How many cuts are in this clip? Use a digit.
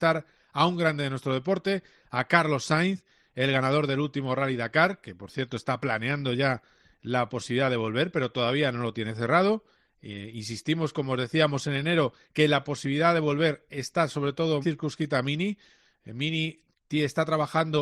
1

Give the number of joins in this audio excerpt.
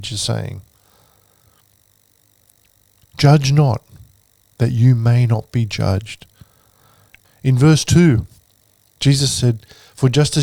1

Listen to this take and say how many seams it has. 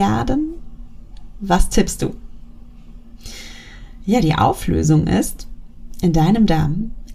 0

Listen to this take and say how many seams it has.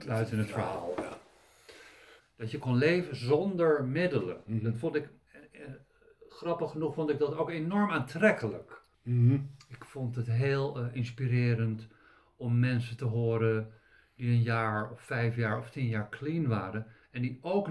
2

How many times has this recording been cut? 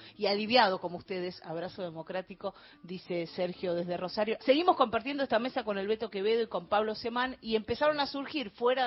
1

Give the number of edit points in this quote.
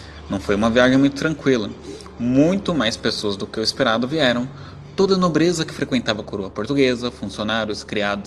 0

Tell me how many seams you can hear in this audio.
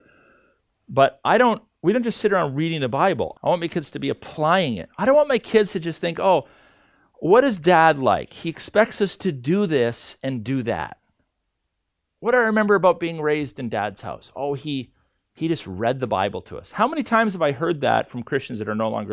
1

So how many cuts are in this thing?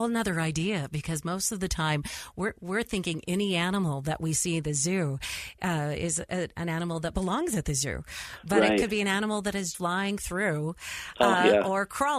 1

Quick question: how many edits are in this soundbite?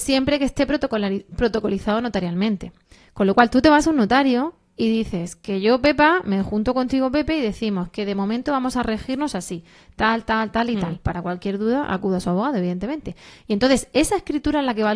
0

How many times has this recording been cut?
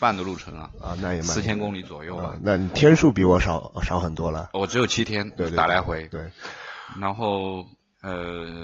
0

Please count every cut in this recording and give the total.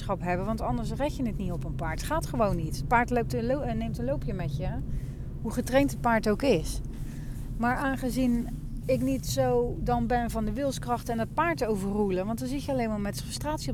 1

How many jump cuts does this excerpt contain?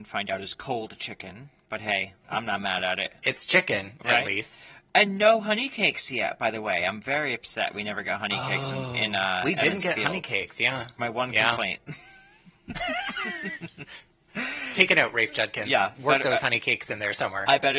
1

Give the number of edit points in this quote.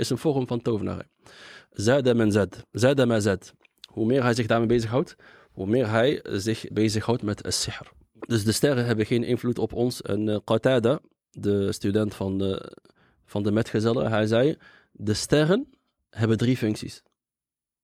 2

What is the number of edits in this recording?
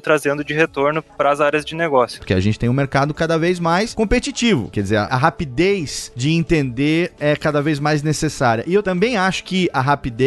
2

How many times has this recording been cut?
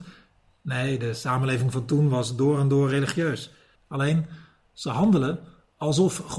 1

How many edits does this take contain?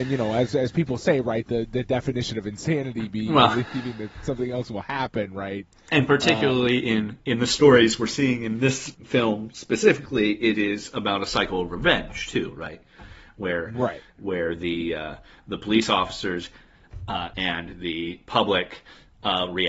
2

